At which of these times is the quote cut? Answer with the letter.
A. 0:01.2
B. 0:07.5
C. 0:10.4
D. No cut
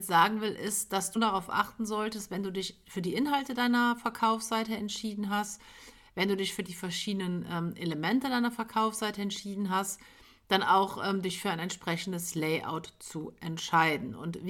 A